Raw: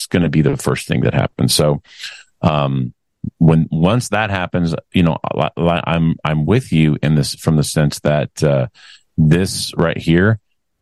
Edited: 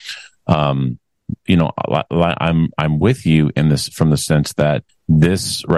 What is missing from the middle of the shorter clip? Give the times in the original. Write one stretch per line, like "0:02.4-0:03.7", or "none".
0:03.3-0:04.8
0:08.4-0:09.0